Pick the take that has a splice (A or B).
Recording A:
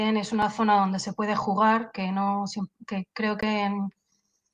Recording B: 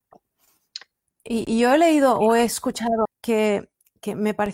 B